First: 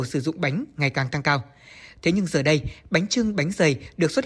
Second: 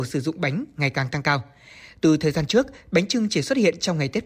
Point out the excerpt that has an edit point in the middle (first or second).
first